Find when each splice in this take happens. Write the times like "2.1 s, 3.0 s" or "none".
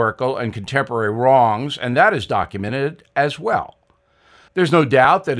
4.5 s